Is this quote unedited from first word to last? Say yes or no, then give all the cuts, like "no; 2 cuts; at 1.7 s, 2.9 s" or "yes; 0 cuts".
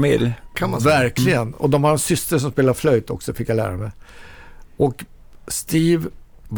yes; 0 cuts